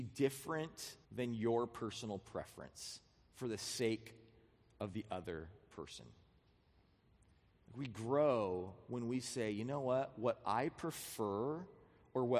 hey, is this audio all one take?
no; 1 cut; at 1.0 s

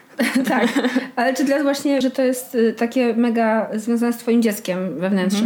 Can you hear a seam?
yes; 1 cut; at 2.0 s

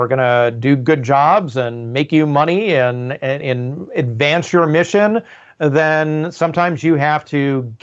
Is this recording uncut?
yes; 0 cuts

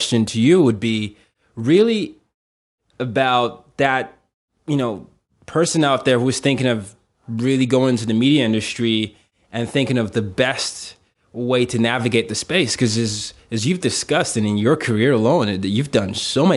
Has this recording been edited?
no; 0 cuts

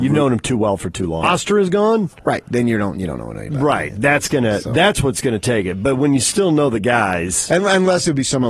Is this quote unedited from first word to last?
no; 1 cut; at 1.2 s

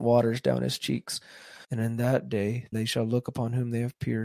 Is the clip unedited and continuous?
no; 2 cuts; at 1.6 s, 2.7 s

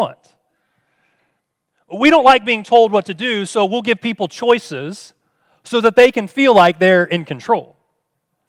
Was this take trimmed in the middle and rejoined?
no; 0 cuts

